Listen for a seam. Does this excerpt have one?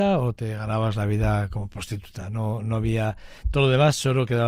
no; 0 cuts

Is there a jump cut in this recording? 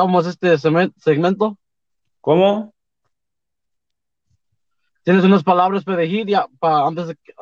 no; 0 cuts

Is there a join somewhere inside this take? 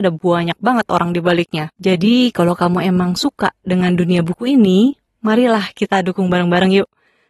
yes; 1 cut; at 1.7 s

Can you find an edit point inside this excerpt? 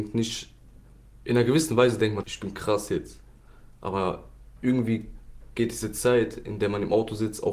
yes; 1 cut; at 2.2 s

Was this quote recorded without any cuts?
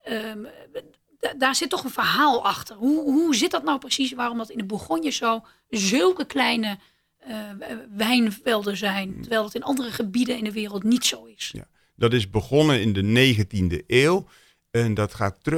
yes; 0 cuts

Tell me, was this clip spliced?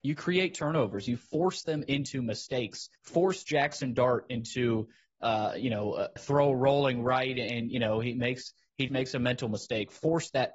yes; 3 cuts; at 3.0 s, 6.2 s, 8.9 s

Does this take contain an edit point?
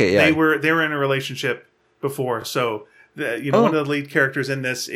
no; 0 cuts

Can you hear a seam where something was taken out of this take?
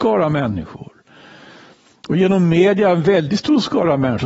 no; 0 cuts

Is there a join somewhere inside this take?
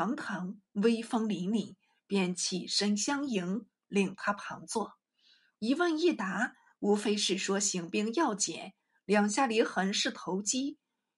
no; 0 cuts

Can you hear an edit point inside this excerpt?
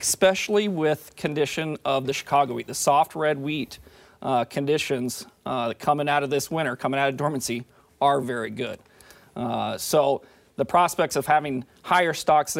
yes; 1 cut; at 8.2 s

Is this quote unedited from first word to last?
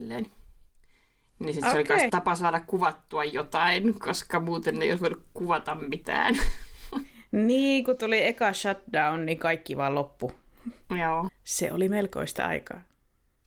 no; 2 cuts; at 2.1 s, 11.3 s

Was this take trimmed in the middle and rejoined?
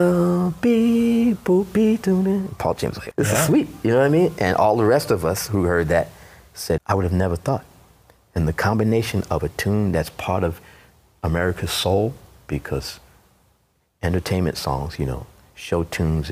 yes; 2 cuts; at 3.1 s, 6.8 s

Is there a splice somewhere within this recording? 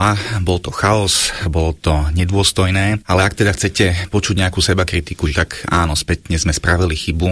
yes; 2 cuts; at 1.4 s, 5.3 s

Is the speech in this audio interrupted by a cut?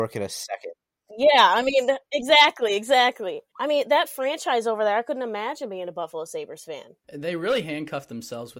no; 0 cuts

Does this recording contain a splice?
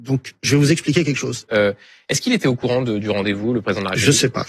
yes; 1 cut; at 1.5 s

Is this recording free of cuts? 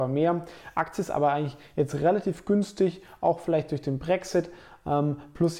yes; 0 cuts

